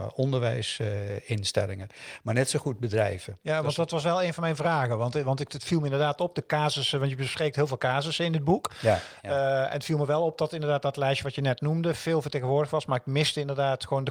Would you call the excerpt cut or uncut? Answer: uncut